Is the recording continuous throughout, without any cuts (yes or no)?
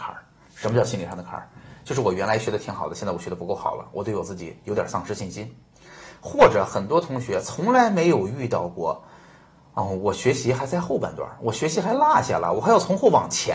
yes